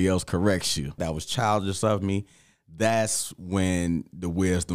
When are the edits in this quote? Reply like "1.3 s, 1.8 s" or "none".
1.0 s